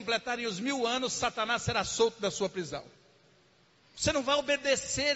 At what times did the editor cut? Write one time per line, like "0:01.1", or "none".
0:03.8